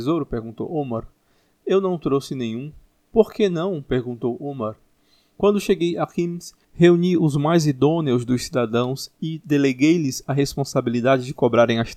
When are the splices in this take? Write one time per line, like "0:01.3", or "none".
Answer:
none